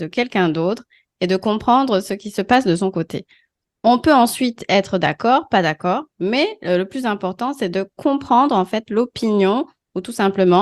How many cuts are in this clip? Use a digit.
0